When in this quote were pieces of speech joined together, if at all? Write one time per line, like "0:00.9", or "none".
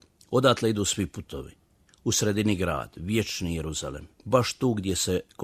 0:01.9
0:04.1